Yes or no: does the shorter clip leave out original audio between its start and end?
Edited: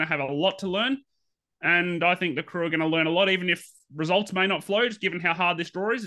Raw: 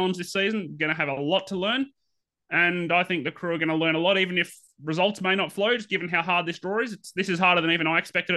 no